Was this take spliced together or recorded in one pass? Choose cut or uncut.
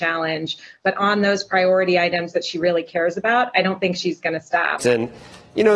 cut